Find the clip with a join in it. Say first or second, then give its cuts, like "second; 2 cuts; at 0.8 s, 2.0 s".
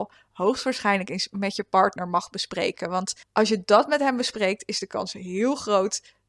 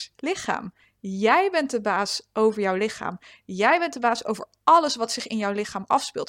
first; 1 cut; at 3.2 s